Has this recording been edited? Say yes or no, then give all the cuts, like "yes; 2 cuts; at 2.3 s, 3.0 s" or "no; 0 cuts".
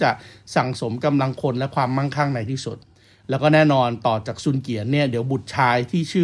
no; 0 cuts